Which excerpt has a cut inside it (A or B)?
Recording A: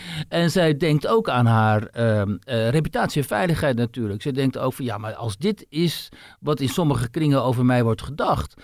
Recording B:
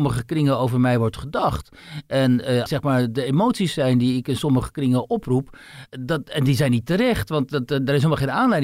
B